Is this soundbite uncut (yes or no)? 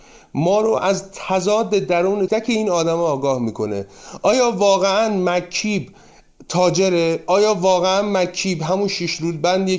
no